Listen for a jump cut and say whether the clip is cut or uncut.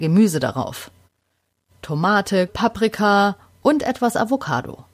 cut